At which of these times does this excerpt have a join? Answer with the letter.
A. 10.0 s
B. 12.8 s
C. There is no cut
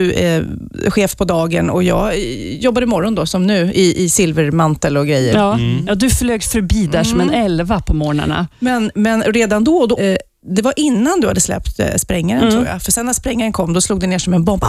A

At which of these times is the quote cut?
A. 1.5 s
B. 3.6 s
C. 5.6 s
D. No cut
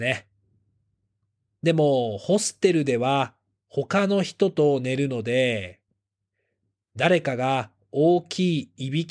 A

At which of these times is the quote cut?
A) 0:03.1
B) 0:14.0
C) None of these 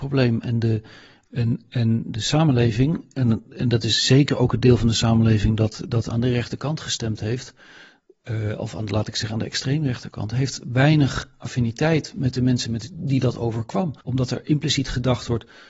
B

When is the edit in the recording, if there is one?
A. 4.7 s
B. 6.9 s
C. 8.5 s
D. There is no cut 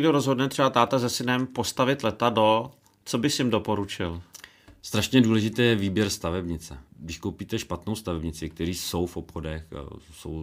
B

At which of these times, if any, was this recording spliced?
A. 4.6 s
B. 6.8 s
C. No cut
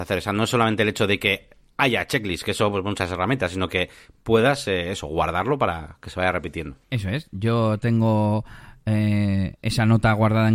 B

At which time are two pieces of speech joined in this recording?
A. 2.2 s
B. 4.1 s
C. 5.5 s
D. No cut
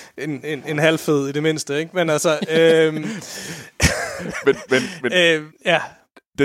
C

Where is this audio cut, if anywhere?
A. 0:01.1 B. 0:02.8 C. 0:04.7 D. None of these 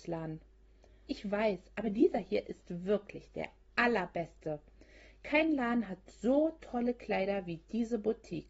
A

